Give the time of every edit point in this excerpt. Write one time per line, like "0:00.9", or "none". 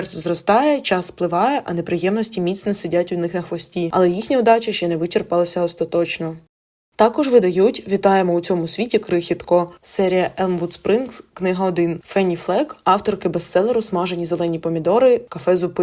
none

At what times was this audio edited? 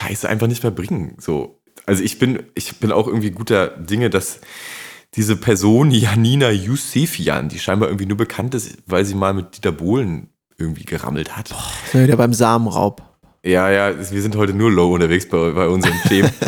none

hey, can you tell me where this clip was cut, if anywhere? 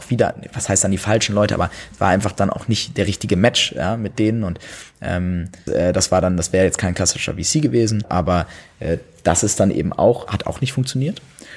0:05.7
0:08.0
0:10.3

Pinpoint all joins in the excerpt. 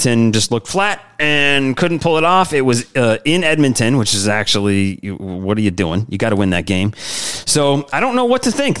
none

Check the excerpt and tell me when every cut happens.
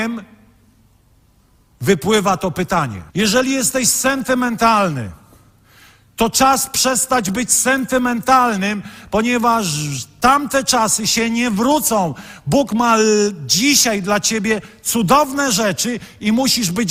0:03.1

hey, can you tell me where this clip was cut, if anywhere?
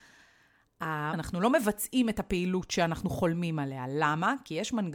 0:01.1

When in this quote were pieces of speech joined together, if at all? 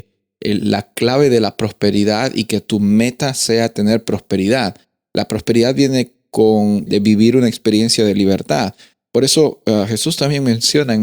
0:06.9

